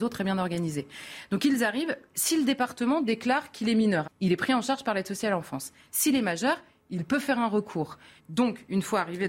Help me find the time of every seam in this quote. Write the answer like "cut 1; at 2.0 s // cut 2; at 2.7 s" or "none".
cut 1; at 4.0 s // cut 2; at 8.2 s